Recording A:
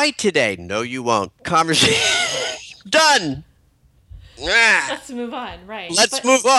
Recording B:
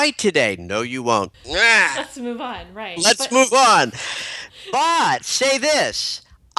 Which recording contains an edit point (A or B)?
B